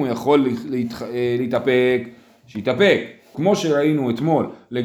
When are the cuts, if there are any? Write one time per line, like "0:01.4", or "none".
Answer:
0:03.3